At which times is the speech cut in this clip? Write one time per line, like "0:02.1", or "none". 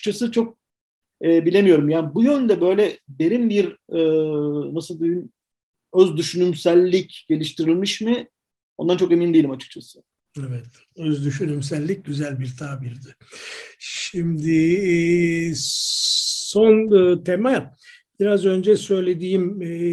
none